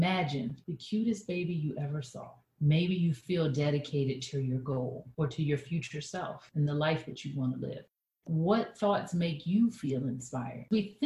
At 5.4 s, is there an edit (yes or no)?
no